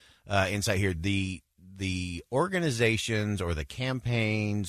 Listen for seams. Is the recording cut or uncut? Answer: uncut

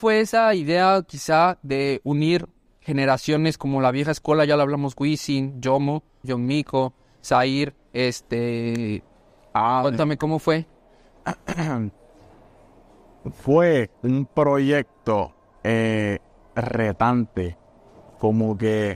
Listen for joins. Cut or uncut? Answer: cut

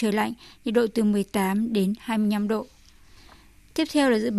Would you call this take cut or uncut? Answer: uncut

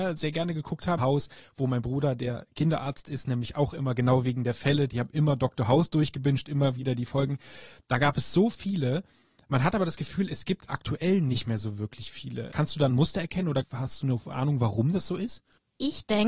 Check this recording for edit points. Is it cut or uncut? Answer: cut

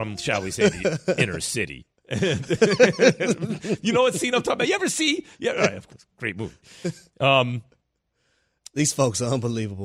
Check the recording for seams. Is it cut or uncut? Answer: uncut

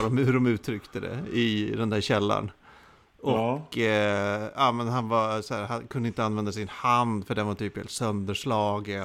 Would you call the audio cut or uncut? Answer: uncut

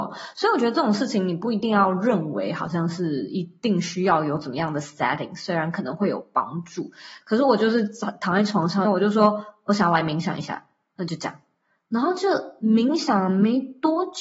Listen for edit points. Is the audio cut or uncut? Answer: cut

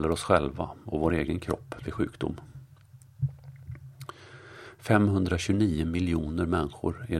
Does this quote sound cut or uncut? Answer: uncut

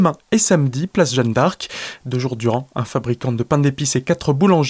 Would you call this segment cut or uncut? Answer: cut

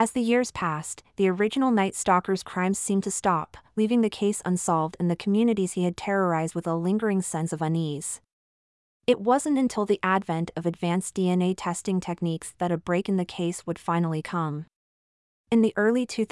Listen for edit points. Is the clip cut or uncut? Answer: uncut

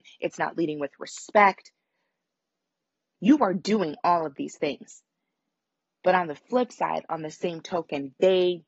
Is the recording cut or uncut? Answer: uncut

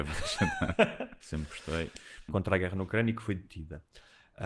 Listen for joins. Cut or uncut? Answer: cut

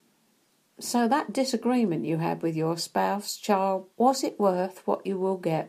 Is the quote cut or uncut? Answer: cut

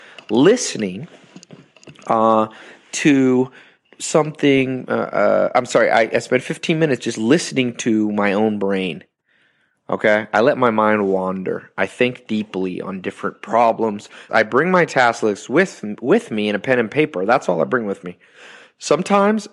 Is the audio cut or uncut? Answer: cut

